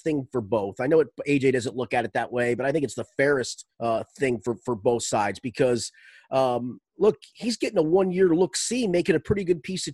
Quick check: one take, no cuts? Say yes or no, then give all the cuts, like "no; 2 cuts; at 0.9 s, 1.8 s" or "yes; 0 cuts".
no; 1 cut; at 3.7 s